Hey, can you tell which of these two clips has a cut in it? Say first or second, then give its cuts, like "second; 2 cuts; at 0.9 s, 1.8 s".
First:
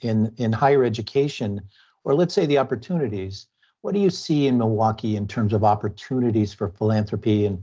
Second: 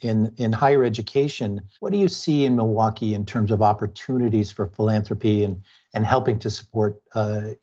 second; 1 cut; at 1.8 s